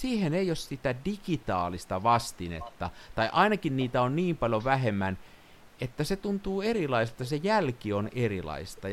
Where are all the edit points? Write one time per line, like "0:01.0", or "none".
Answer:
none